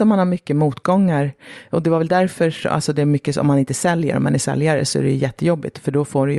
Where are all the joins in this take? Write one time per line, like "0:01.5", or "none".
none